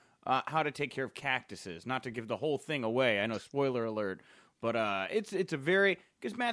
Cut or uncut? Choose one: uncut